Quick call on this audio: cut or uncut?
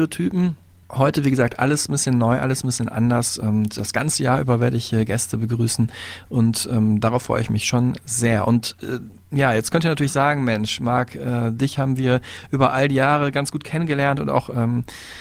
uncut